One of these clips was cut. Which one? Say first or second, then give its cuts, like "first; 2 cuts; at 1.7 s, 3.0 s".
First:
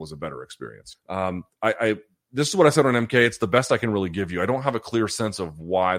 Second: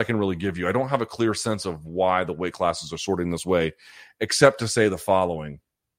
first; 1 cut; at 0.9 s